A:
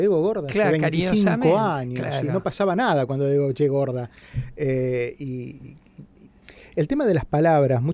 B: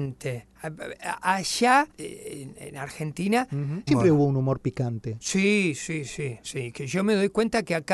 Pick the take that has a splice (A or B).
B